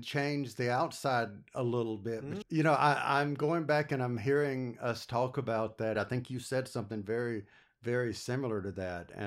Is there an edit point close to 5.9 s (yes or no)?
yes